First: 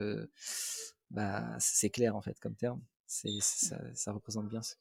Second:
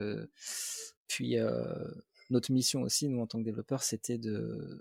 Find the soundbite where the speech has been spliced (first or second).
second